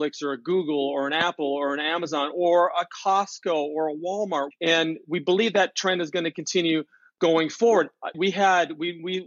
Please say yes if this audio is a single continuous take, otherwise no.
no